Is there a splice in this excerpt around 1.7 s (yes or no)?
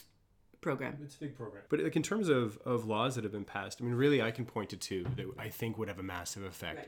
yes